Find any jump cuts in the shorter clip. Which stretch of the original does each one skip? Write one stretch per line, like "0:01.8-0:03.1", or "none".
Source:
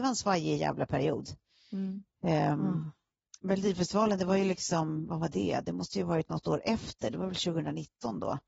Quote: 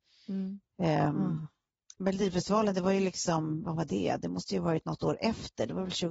none